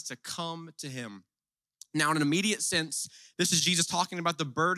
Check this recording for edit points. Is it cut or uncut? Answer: uncut